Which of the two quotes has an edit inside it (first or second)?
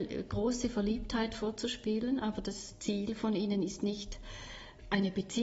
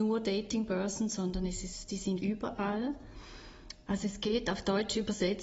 second